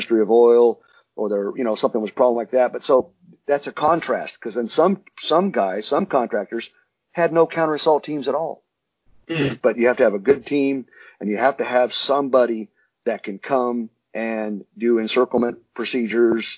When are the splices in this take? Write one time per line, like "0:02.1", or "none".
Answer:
0:09.6

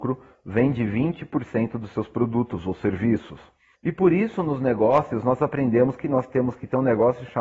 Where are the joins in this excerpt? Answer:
0:03.7

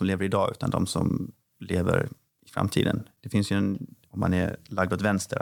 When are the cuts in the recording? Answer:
0:04.0

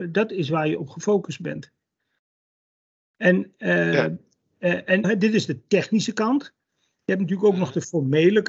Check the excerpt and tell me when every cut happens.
0:05.0

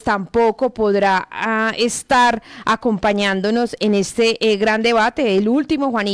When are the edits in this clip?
none

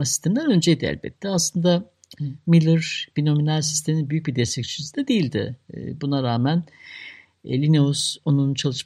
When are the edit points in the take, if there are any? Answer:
none

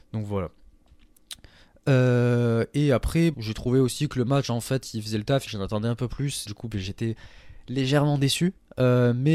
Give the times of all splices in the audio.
0:03.3
0:05.5
0:06.5

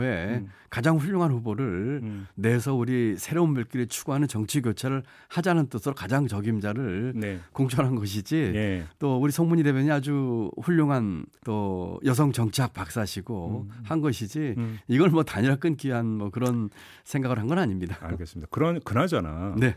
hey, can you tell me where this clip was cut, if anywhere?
0:11.3

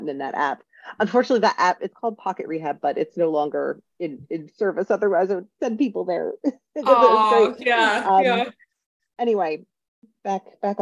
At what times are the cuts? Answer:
none

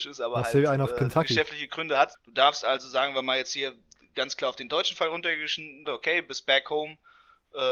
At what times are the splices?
0:02.1
0:05.9

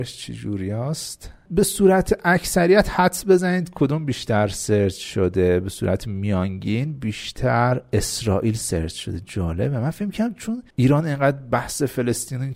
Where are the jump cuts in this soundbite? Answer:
0:01.5
0:10.7

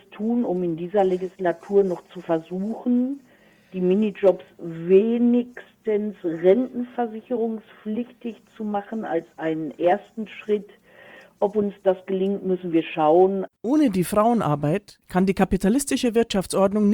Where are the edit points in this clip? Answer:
0:13.5

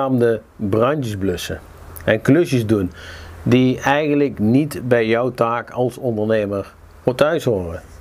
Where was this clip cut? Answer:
none

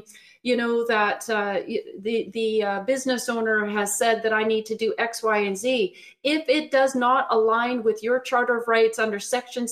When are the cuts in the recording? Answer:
none

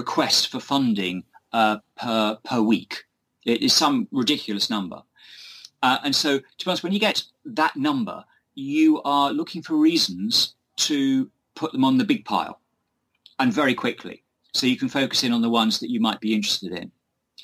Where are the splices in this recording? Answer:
none

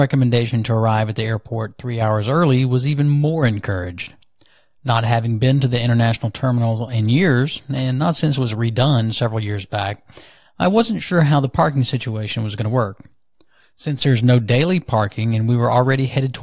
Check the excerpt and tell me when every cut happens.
none

